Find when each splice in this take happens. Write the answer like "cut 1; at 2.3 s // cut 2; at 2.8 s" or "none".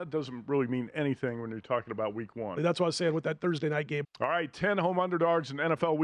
cut 1; at 2.6 s // cut 2; at 4.0 s